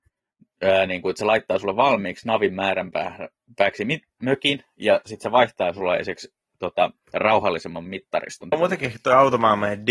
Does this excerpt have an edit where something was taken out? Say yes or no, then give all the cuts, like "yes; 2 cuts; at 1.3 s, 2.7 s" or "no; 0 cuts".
yes; 1 cut; at 8.5 s